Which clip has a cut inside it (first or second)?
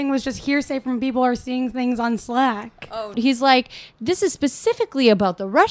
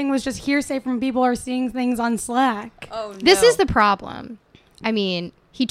first